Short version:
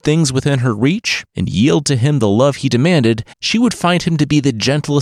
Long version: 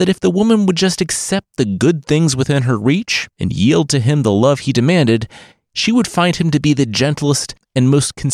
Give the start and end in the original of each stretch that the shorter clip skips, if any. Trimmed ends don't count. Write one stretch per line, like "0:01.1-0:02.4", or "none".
0:05.4-0:05.7